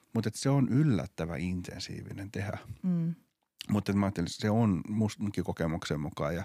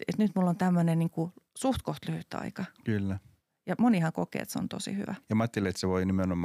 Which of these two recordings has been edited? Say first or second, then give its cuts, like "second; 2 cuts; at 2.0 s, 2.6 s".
second; 1 cut; at 5.2 s